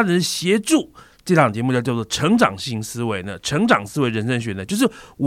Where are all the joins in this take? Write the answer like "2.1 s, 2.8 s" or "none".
1.2 s